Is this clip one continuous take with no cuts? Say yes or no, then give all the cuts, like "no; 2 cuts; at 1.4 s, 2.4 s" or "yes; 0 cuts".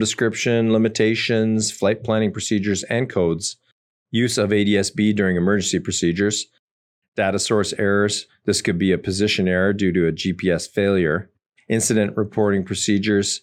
yes; 0 cuts